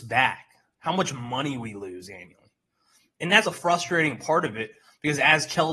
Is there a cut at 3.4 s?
yes; 1 cut; at 3.4 s

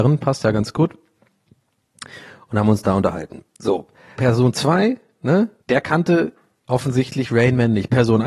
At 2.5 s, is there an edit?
no; 2 cuts; at 4.2 s, 5.6 s

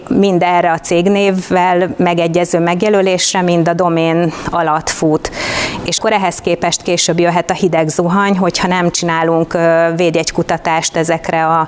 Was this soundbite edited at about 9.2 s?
no; 1 cut; at 6.0 s

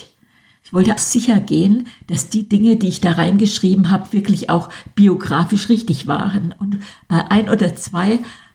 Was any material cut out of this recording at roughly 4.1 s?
no; 1 cut; at 1.0 s

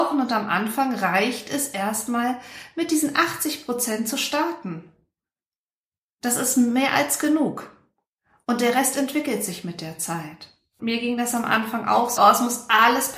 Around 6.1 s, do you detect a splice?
no; 2 cuts; at 10.8 s, 12.2 s

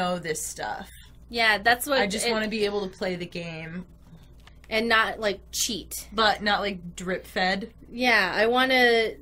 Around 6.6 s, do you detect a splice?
no; 1 cut; at 4.5 s

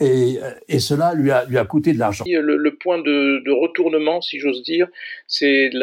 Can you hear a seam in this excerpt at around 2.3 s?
yes; 1 cut; at 2.3 s

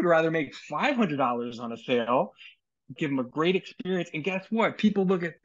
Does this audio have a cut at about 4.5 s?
no; 1 cut; at 3.0 s

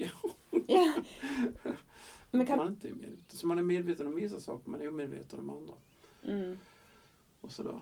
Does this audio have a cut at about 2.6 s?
yes; 1 cut; at 2.6 s

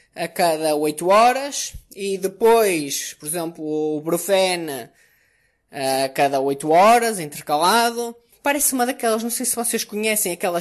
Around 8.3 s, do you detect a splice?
yes; 1 cut; at 8.3 s

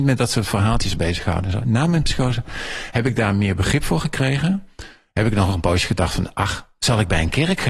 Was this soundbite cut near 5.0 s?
no; 0 cuts

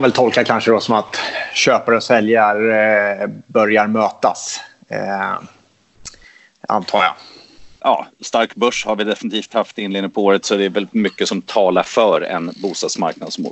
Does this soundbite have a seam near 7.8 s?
yes; 1 cut; at 7.8 s

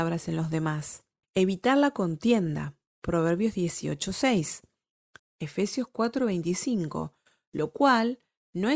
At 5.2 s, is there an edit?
yes; 2 cuts; at 1.2 s, 5.2 s

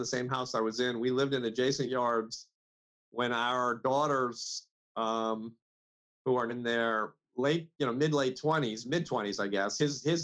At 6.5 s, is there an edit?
yes; 1 cut; at 6.5 s

